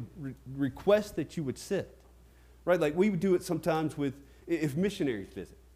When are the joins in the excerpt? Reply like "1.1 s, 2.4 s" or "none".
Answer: none